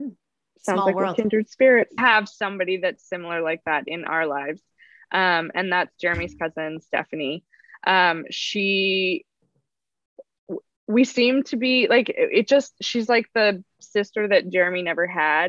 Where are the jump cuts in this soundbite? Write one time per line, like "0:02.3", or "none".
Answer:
0:02.0